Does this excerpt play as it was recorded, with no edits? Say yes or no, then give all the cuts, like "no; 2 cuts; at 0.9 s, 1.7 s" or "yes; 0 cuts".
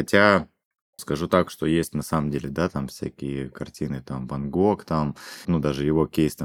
no; 2 cuts; at 1.0 s, 5.4 s